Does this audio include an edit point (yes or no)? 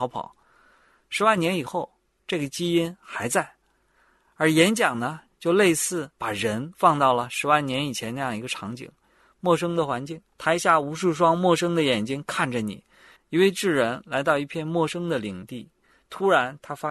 yes